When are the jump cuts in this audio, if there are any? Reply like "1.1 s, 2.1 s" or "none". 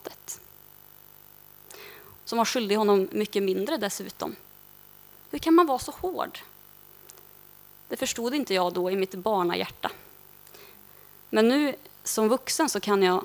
2.2 s

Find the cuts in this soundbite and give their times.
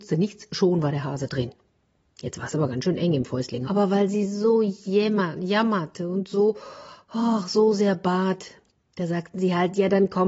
3.6 s

